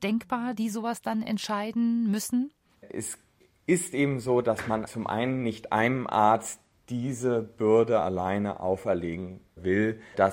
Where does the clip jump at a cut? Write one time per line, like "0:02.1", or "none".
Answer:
none